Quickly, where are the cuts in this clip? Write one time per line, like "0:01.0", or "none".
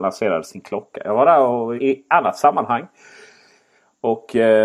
0:01.8